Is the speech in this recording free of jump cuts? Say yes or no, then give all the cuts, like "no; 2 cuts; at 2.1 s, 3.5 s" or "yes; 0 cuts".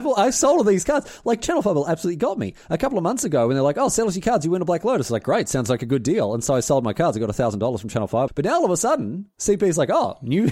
no; 1 cut; at 8.3 s